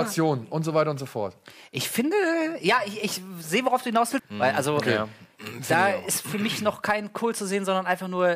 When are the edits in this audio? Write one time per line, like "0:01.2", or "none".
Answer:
0:04.2